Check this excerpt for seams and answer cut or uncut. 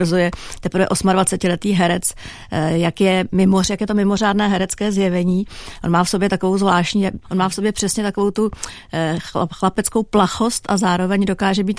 cut